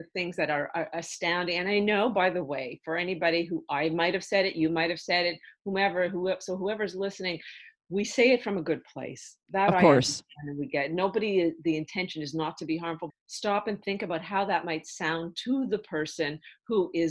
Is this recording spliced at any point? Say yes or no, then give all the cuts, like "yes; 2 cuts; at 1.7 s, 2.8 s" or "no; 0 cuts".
yes; 1 cut; at 13.1 s